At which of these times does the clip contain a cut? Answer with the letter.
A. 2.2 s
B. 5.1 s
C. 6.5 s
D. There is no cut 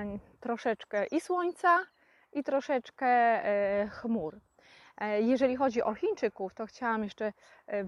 D